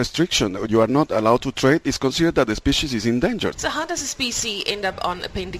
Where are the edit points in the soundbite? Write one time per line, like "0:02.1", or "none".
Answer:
0:01.8
0:03.5

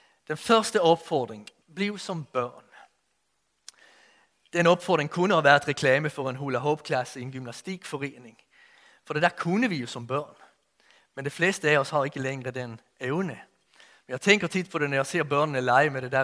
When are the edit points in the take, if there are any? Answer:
0:01.6

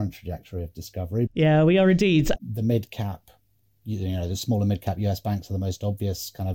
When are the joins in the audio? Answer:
0:01.3
0:02.4

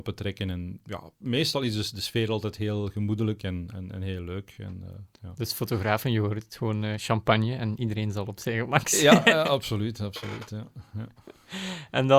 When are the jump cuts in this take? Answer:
none

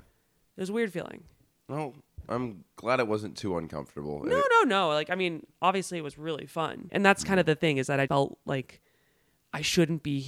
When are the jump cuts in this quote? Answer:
0:06.9
0:08.1

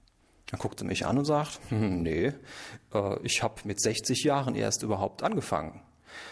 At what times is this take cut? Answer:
none

